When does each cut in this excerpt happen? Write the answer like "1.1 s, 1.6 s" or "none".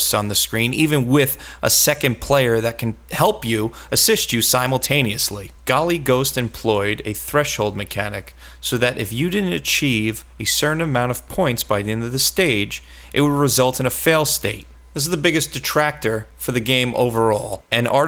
5.6 s